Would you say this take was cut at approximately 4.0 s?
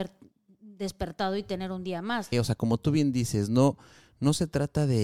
no; 1 cut; at 2.3 s

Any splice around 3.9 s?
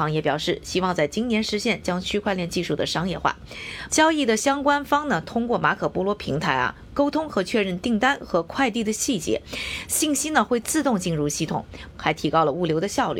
yes; 2 cuts; at 3.9 s, 11.9 s

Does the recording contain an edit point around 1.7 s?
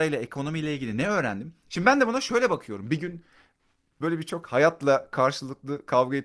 yes; 1 cut; at 1.7 s

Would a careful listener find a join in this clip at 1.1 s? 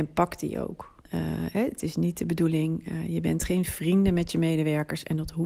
yes; 1 cut; at 1.1 s

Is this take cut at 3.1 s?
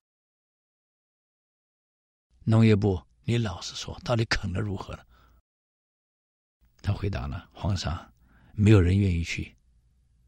yes; 1 cut; at 3.1 s

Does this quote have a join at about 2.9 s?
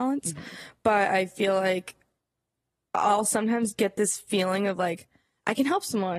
no; 0 cuts

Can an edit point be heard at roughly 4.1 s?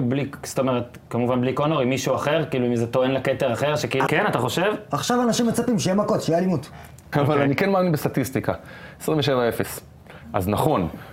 yes; 2 cuts; at 4.1 s, 7.1 s

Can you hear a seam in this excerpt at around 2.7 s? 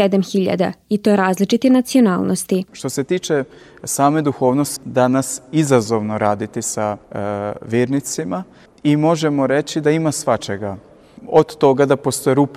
no; 2 cuts; at 4.8 s, 7.0 s

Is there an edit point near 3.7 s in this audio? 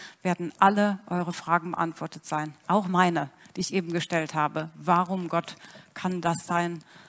no; 0 cuts

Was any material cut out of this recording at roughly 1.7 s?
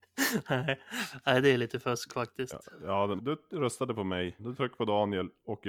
no; 2 cuts; at 3.2 s, 4.4 s

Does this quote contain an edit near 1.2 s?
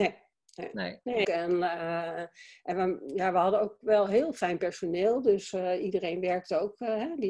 yes; 1 cut; at 1.2 s

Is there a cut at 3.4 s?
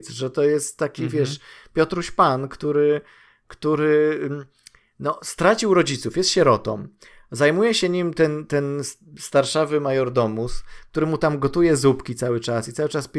no; 0 cuts

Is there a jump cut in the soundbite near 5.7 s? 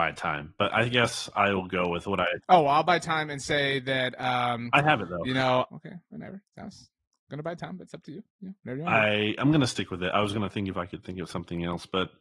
yes; 1 cut; at 5.7 s

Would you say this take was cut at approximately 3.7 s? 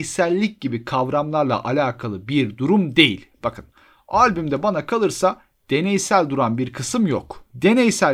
no; 0 cuts

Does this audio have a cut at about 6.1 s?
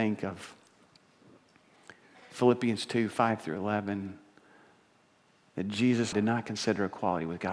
yes; 1 cut; at 6.1 s

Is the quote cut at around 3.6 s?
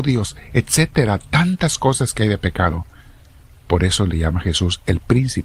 yes; 1 cut; at 3.6 s

